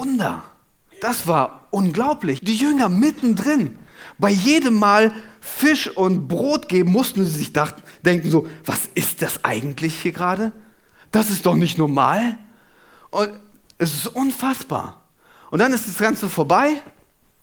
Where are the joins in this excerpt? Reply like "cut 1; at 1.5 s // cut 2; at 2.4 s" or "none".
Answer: cut 1; at 2.4 s